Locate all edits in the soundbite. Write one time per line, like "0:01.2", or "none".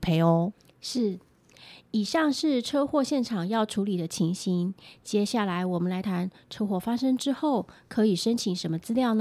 0:06.0